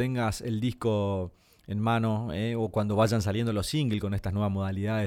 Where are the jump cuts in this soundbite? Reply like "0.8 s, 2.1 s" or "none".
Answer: none